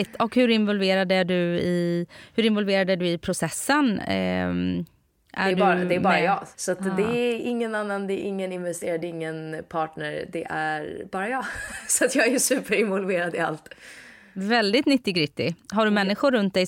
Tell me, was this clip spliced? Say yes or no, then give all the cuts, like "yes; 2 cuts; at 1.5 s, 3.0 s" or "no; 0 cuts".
no; 0 cuts